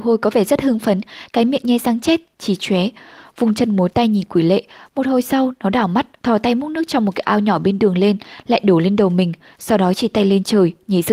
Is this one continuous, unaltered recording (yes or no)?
no